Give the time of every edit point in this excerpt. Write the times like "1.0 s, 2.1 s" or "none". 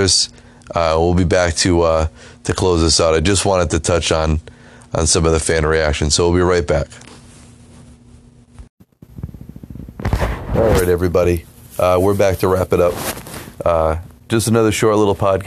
14.3 s